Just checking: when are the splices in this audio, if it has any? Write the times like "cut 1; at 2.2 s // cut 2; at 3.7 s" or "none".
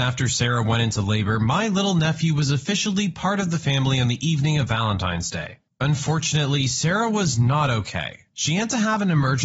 none